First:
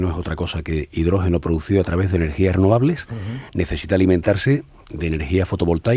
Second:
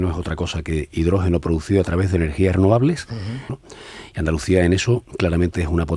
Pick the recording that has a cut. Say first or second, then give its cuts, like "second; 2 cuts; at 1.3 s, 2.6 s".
second; 1 cut; at 3.5 s